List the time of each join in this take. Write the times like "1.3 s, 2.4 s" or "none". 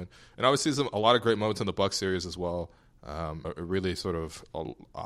3.4 s